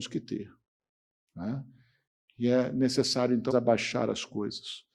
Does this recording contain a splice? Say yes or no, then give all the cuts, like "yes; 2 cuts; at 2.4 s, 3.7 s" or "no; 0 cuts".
yes; 1 cut; at 3.5 s